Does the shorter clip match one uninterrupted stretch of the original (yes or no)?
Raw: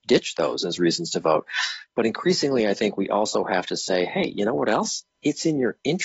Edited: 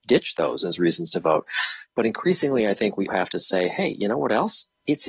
no